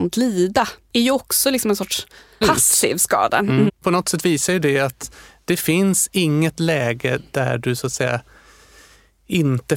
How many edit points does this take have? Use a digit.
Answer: 2